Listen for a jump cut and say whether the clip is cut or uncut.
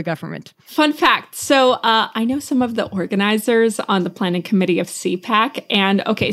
uncut